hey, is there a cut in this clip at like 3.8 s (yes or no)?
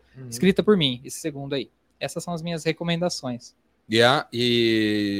no